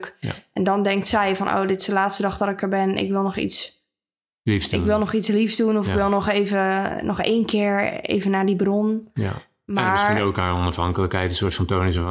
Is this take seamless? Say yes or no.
yes